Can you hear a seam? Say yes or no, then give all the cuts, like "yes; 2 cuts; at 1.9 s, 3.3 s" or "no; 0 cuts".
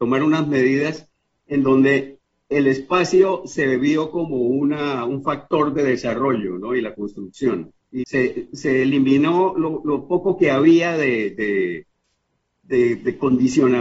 yes; 1 cut; at 8.0 s